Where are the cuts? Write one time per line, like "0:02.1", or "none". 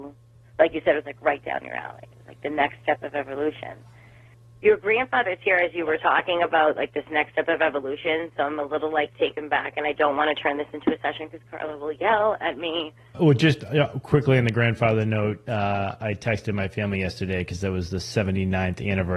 none